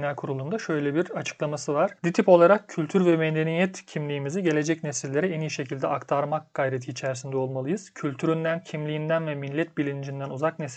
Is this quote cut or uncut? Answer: cut